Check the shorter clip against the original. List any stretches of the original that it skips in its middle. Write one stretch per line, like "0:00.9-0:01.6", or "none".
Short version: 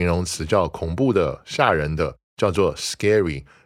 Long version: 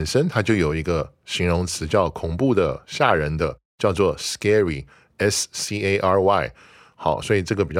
none